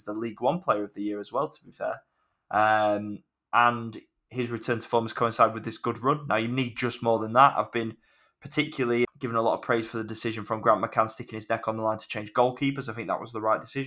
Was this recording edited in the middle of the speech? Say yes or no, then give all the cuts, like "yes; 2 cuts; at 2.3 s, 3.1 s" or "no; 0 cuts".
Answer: yes; 1 cut; at 9.0 s